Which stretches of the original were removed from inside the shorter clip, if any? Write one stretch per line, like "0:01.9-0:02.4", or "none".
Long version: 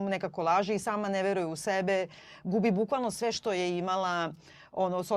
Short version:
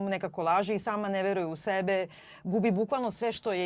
none